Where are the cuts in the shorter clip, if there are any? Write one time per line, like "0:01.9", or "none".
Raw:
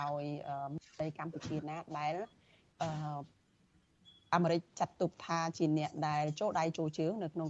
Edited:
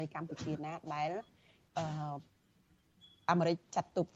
none